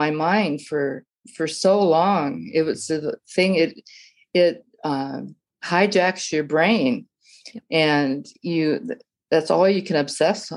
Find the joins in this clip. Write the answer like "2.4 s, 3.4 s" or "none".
none